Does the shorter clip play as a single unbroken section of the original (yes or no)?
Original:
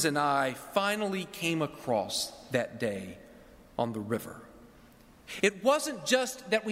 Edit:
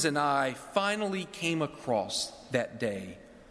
yes